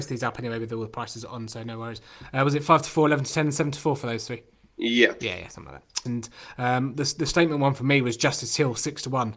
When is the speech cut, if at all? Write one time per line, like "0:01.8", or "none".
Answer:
0:06.1

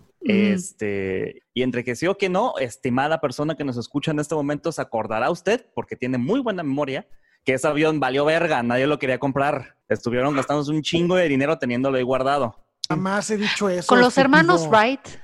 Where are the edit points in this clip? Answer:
0:01.4
0:09.8
0:12.9

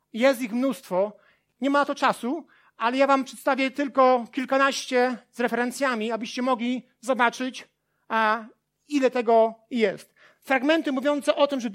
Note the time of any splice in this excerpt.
none

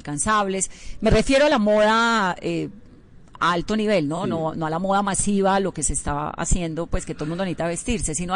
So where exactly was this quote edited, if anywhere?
none

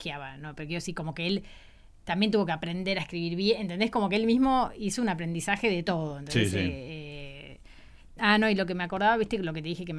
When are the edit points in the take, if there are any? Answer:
0:08.2

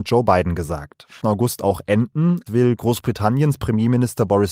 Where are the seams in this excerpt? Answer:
0:01.2
0:02.5

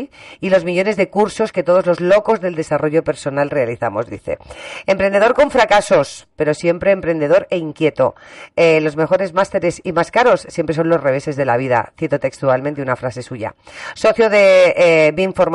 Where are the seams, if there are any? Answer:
none

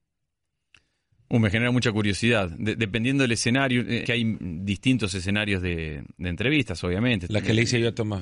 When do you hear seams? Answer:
0:04.0
0:07.3

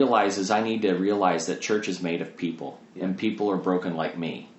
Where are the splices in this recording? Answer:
0:02.9

